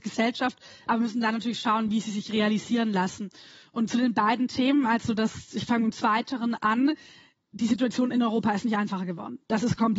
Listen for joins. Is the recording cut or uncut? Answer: uncut